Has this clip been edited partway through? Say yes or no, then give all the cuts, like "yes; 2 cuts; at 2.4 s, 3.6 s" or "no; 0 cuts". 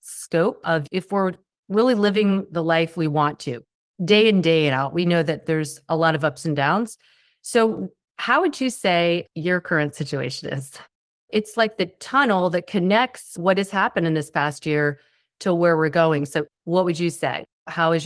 yes; 1 cut; at 16.5 s